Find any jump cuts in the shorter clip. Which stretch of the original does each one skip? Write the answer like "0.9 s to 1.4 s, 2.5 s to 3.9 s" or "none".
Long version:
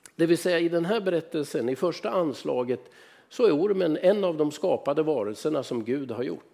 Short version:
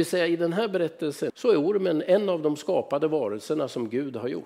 1.6 s to 3.2 s

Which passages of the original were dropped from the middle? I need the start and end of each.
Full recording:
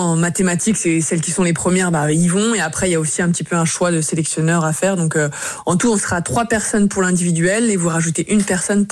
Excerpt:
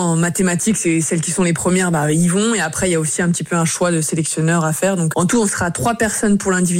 5.1 s to 5.6 s

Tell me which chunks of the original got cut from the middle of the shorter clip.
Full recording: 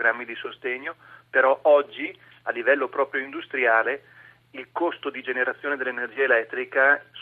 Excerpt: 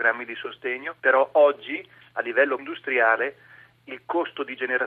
1.0 s to 1.3 s, 2.9 s to 3.3 s

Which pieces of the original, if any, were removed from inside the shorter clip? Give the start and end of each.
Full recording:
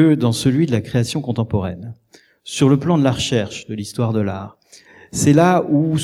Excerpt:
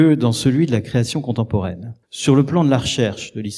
2.0 s to 2.4 s

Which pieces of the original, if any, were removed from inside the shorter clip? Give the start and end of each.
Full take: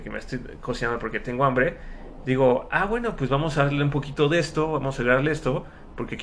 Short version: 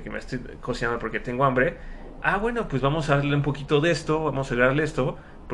2.2 s to 2.7 s

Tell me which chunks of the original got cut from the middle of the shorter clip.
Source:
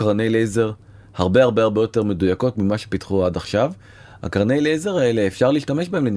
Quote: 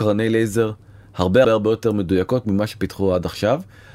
1.4 s to 1.6 s

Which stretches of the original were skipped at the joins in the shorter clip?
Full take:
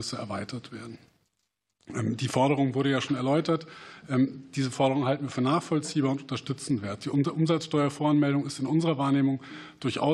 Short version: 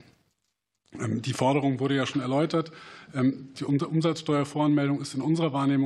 4.5 s to 7.0 s

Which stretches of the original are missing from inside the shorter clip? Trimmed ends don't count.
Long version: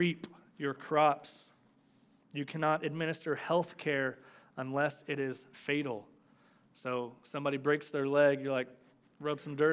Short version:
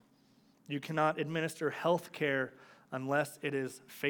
none

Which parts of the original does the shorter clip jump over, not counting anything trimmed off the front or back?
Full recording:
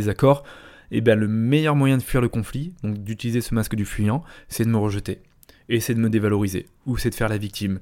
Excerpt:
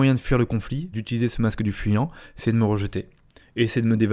2.7 s to 3.0 s

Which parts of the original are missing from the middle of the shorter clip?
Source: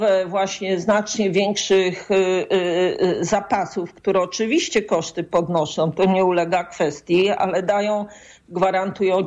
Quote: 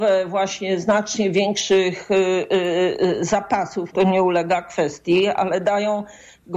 3.9 s to 5.9 s

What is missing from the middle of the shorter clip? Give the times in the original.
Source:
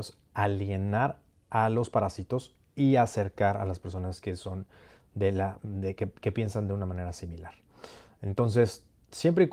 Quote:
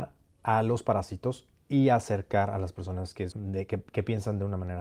4.4 s to 5.6 s

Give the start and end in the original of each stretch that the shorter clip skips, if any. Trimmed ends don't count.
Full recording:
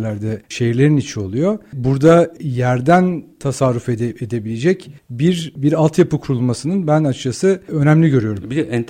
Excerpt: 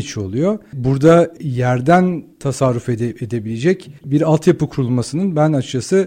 5.0 s to 5.5 s

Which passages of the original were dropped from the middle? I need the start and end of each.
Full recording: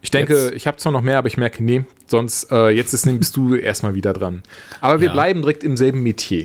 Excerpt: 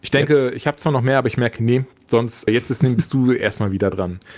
2.5 s to 2.7 s

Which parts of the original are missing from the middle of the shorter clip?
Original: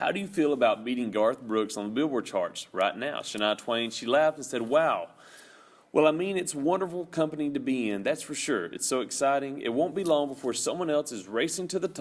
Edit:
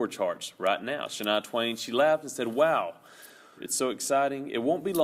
5.7 s to 8.7 s

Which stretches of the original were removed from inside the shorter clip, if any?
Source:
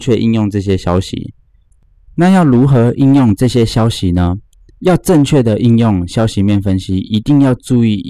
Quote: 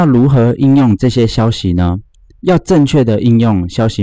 none

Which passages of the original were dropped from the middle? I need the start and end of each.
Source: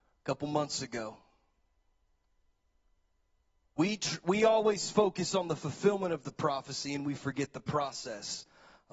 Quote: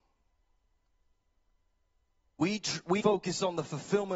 4.4 s to 4.9 s

